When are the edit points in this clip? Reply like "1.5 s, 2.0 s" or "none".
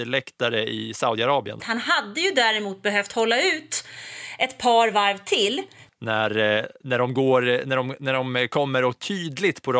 1.6 s, 5.9 s